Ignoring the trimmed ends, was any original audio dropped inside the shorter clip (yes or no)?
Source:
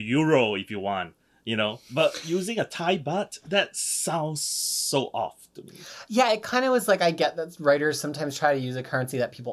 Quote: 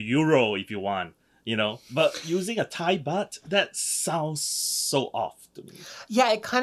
no